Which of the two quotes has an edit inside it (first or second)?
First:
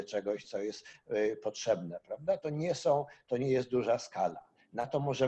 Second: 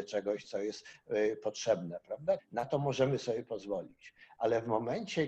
second